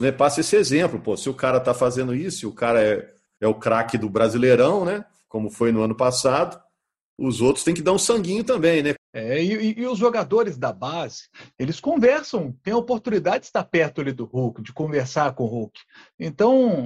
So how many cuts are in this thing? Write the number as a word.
one